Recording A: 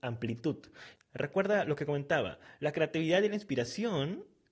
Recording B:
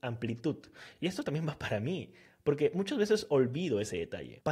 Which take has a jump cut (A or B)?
A